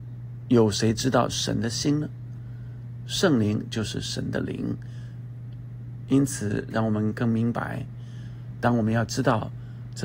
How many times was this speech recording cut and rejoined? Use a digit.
1